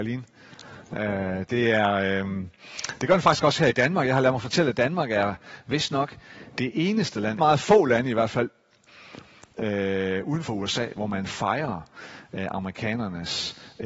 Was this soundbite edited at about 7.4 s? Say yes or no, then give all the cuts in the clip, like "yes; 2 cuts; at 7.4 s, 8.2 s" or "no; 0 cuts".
yes; 1 cut; at 7.4 s